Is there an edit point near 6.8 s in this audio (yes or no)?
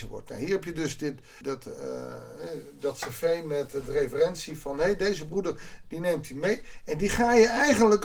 no